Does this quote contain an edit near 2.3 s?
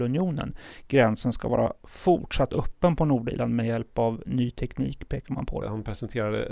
no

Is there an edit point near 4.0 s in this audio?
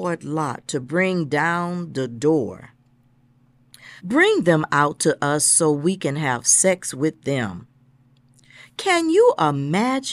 yes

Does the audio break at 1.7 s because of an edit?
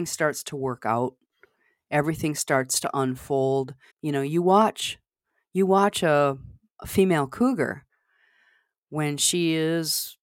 no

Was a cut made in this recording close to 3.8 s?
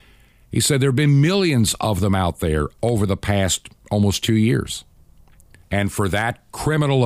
yes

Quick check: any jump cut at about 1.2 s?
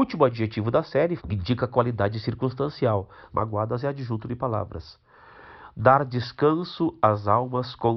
yes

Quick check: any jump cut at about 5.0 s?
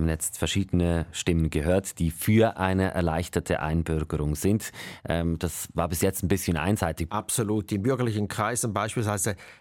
no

